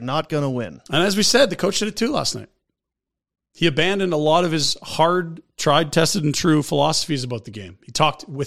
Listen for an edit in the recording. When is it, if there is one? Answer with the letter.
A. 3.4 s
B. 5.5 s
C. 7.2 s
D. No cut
D